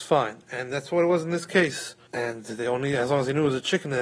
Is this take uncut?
no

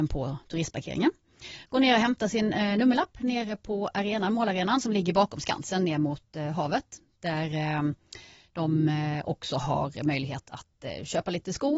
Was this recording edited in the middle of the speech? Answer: no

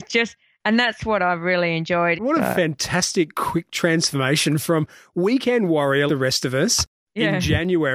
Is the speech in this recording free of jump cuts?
no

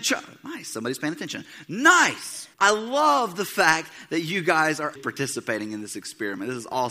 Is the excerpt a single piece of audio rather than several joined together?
no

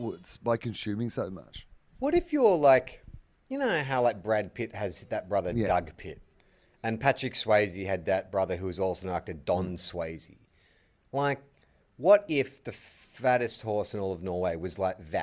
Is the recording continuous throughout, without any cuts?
yes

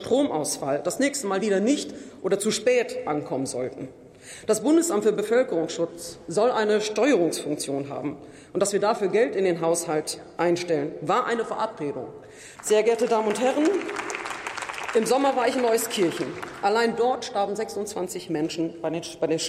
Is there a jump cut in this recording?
yes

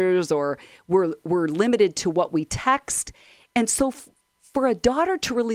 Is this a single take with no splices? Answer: yes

